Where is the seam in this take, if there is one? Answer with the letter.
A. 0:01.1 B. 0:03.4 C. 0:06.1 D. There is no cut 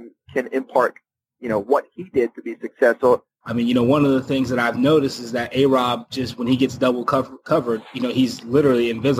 B